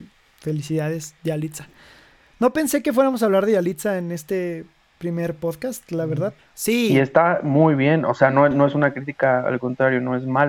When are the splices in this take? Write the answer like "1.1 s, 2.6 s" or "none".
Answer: 6.4 s